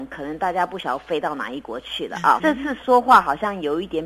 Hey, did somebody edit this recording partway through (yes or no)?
yes